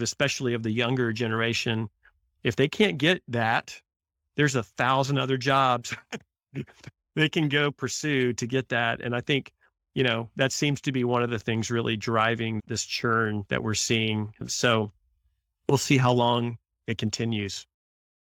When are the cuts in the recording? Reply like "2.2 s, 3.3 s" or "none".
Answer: none